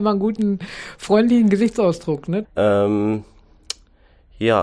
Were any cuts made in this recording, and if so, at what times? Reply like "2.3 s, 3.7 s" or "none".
2.4 s